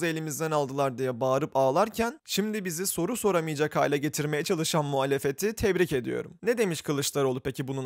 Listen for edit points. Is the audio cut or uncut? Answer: uncut